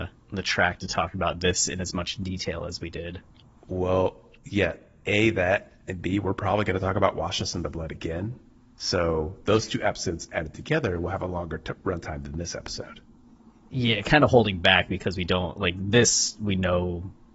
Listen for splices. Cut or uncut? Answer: uncut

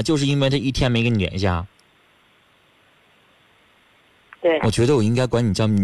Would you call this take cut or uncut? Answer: cut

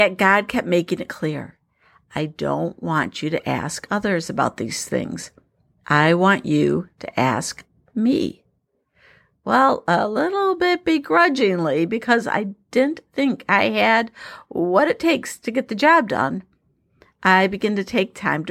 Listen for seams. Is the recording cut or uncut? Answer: uncut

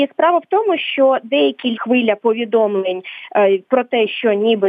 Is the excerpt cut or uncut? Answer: cut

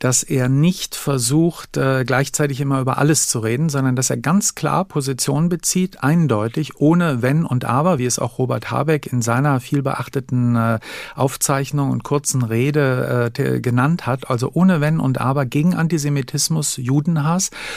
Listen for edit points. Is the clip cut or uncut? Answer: uncut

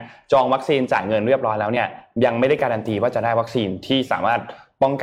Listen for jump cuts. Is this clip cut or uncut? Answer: uncut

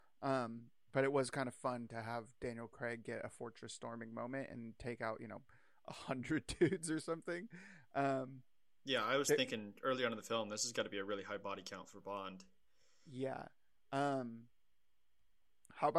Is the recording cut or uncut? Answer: uncut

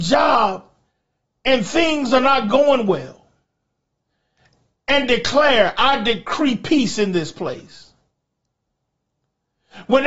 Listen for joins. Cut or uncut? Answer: uncut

